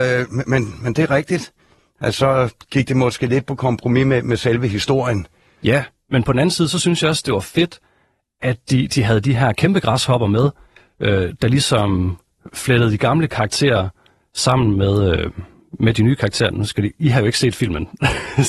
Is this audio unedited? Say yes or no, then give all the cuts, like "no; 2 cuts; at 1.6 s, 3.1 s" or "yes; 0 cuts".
yes; 0 cuts